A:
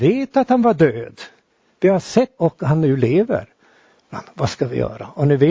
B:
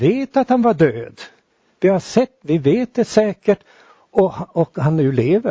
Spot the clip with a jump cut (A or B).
A